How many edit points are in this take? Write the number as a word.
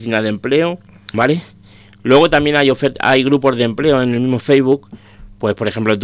one